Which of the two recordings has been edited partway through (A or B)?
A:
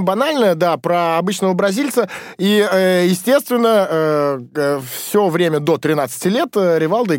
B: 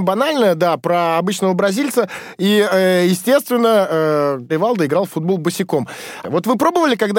B